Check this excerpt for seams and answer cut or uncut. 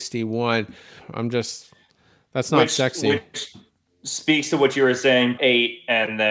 cut